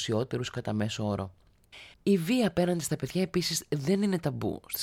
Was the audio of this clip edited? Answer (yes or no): yes